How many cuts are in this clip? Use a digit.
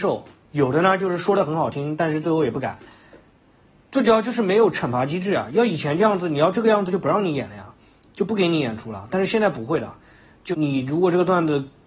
1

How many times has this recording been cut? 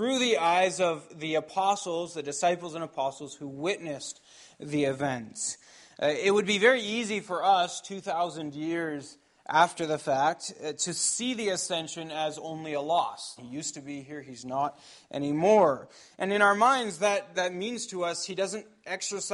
2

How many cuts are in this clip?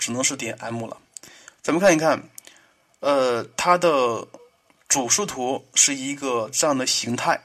1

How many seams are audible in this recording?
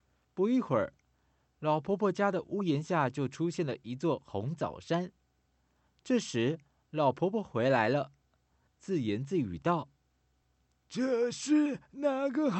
1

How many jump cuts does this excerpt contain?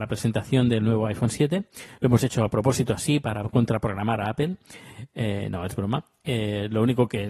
0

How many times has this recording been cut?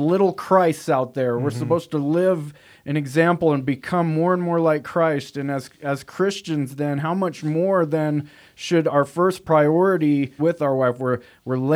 1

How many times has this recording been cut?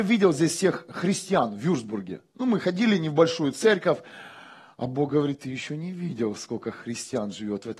0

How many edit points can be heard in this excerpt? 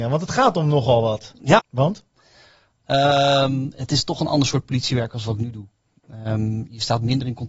1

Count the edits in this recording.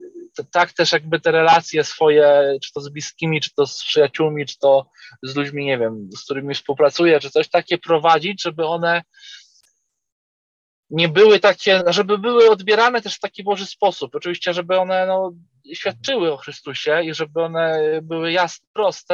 1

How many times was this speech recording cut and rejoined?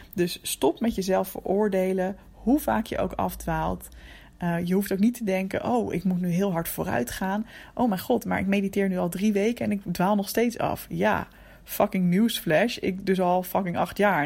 0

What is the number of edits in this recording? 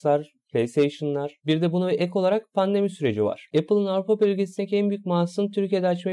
1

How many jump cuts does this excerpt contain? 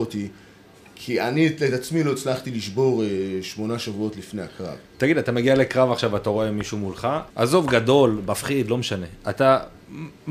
1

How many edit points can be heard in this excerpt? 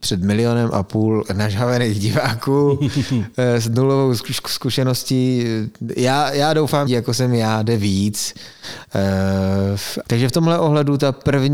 2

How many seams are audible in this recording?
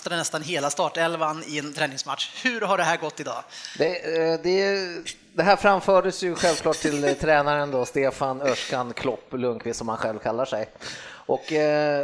0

